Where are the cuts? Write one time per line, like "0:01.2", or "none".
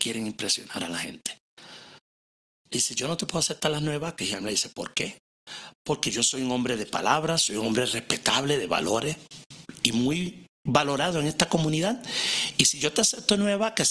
none